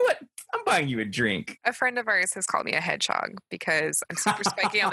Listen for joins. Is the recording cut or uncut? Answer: cut